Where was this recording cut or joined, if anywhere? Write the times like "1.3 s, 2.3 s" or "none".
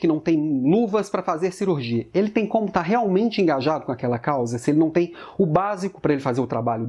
none